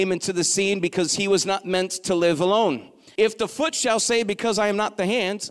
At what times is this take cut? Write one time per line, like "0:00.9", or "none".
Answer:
0:03.2